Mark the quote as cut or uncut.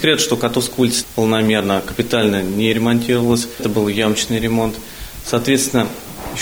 uncut